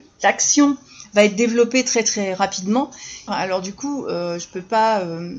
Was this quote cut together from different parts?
yes; 1 cut; at 3.3 s

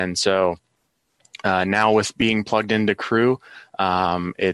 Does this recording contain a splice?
no; 0 cuts

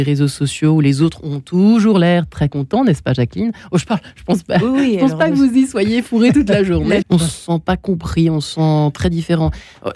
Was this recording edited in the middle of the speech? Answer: yes; 1 cut; at 7.0 s

